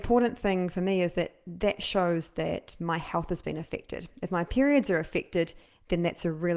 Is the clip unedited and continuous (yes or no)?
yes